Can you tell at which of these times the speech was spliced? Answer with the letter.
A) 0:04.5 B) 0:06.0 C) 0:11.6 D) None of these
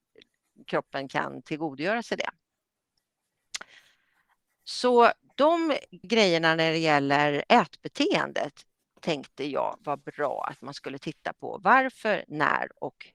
B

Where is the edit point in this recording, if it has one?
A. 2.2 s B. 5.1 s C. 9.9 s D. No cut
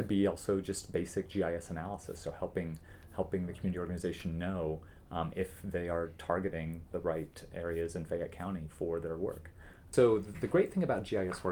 C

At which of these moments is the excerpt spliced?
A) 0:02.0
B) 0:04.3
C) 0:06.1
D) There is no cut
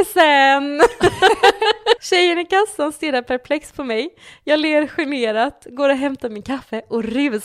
A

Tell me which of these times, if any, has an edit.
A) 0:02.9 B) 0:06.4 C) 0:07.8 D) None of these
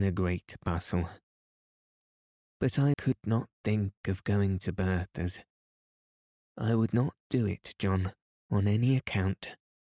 A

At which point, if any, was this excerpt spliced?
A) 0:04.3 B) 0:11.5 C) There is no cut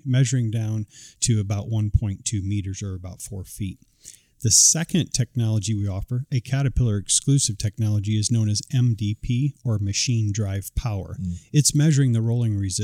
C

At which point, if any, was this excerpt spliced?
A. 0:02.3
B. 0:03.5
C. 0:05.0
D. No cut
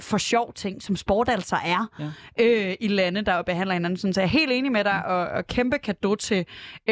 D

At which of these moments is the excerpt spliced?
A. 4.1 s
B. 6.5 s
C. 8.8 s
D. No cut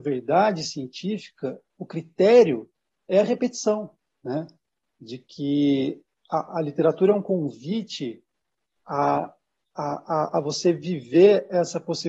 A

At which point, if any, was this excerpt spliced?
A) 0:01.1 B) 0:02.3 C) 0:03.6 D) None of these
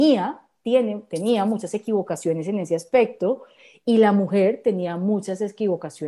D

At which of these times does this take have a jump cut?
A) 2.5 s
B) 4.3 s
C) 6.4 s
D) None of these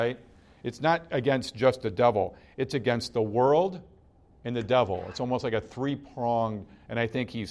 B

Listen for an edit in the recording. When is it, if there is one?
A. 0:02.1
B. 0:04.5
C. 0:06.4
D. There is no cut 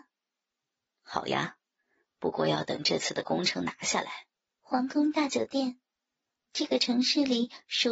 B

